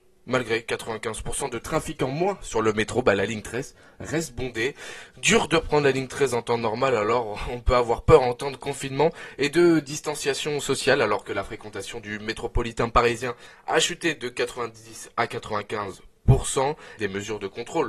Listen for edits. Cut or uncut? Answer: cut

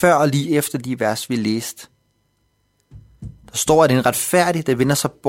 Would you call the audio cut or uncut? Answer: uncut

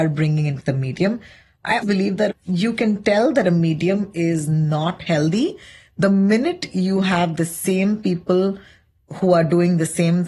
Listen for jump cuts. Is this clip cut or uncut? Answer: cut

